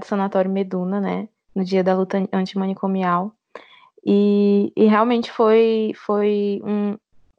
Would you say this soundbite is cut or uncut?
uncut